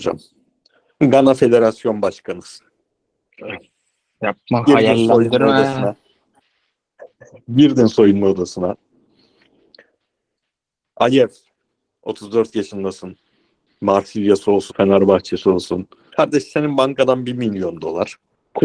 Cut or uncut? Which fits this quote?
cut